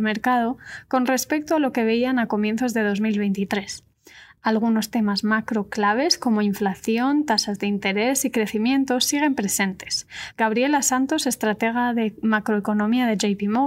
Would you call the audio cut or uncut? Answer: cut